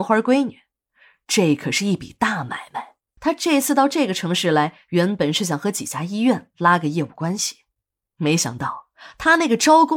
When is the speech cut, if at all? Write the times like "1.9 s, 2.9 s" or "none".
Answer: 3.2 s